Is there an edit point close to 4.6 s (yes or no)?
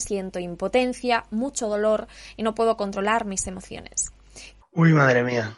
yes